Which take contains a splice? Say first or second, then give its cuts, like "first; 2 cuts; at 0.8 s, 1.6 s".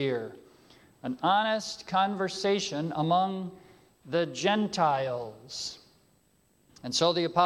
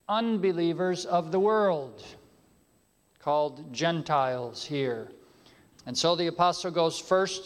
second; 1 cut; at 5.7 s